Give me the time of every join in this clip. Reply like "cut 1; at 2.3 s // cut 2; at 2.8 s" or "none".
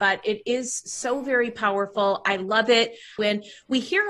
cut 1; at 3.2 s